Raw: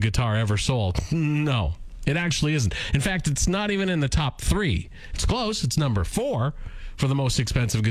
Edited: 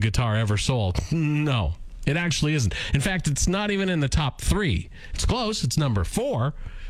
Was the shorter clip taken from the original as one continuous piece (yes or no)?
yes